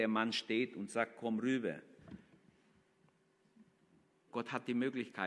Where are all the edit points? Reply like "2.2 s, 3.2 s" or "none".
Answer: 4.3 s

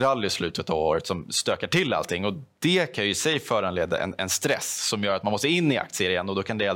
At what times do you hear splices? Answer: none

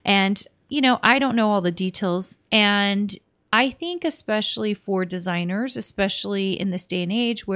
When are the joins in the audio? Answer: 2.5 s

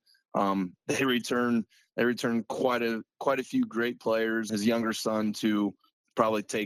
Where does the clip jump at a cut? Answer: 4.5 s

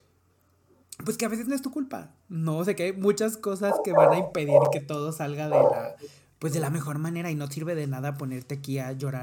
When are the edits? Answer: 2.2 s

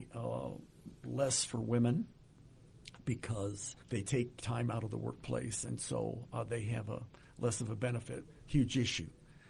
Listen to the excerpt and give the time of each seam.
1.0 s, 3.8 s, 8.2 s

